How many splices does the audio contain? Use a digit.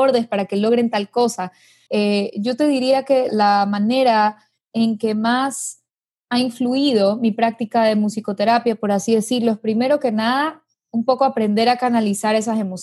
2